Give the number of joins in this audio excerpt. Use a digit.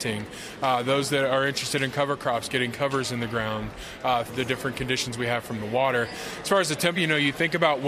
2